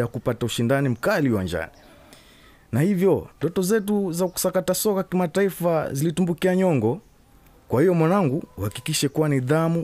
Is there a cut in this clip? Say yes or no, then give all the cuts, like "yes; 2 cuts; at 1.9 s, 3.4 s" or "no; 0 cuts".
yes; 1 cut; at 3.3 s